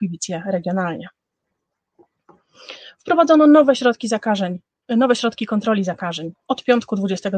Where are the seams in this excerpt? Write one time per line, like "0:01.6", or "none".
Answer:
0:06.5

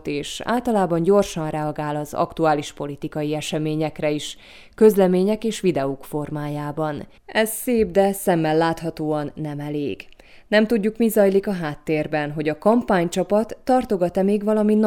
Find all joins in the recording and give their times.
0:07.2

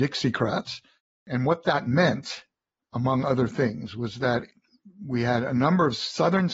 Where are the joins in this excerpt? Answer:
none

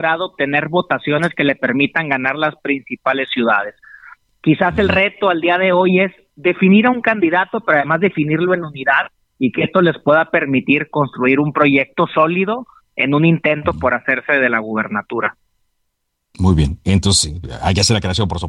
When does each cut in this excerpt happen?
none

